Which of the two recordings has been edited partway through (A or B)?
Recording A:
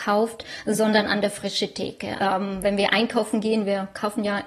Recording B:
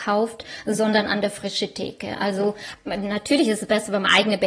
A